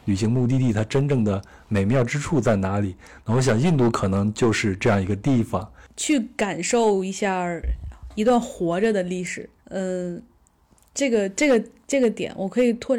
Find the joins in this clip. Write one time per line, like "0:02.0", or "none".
0:09.6